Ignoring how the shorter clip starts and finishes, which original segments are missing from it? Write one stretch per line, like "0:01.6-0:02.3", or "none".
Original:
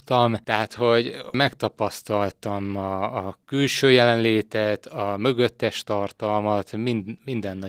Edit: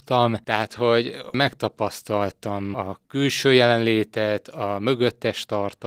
0:02.7-0:03.1